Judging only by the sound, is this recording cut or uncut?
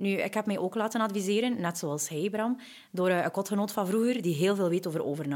uncut